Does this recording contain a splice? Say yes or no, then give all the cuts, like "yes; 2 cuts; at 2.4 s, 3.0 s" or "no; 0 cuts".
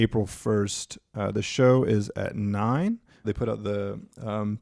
yes; 1 cut; at 3.2 s